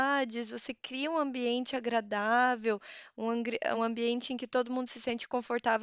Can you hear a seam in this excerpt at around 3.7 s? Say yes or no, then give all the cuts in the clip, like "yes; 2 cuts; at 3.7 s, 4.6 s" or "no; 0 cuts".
yes; 1 cut; at 3.7 s